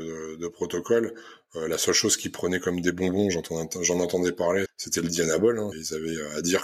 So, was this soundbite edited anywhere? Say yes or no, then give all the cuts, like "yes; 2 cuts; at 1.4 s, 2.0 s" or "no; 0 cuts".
yes; 2 cuts; at 4.7 s, 5.7 s